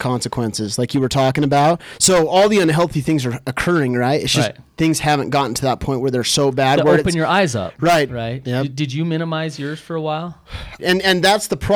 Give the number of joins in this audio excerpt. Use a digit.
2